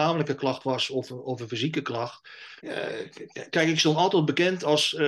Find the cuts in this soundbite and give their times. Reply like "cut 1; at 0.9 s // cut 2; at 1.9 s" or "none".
cut 1; at 2.6 s